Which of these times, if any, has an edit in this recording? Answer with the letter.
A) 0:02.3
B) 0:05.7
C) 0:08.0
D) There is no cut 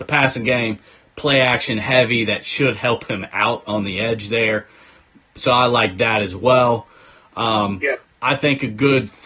C